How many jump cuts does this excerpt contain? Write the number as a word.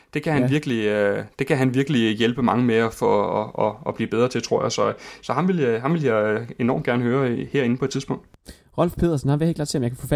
zero